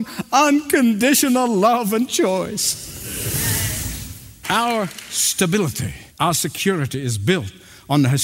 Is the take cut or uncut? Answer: cut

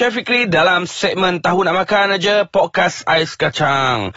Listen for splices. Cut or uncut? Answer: uncut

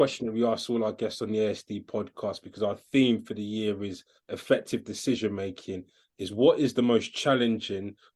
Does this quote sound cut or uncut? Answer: uncut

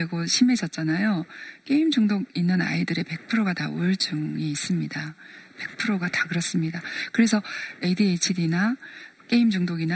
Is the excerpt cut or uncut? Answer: uncut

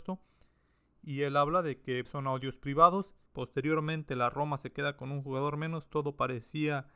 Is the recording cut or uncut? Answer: cut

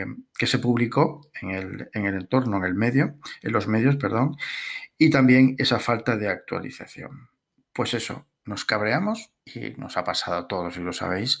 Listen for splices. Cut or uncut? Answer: cut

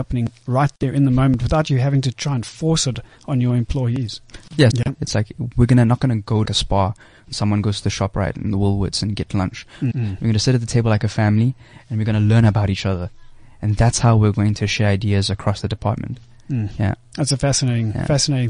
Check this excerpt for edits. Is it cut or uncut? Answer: cut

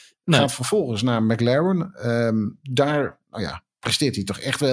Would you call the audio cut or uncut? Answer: uncut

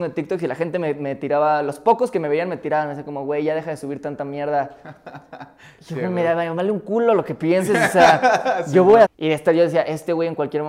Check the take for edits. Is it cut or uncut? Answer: cut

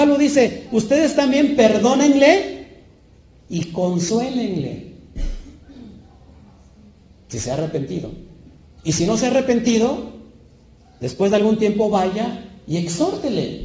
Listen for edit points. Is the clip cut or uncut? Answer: uncut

